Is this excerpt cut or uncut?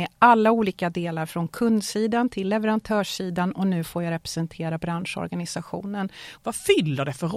cut